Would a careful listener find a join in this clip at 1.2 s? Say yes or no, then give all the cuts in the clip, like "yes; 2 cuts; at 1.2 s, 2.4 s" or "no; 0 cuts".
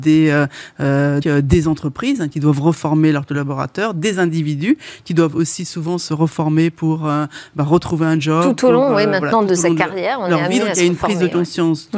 yes; 1 cut; at 1.2 s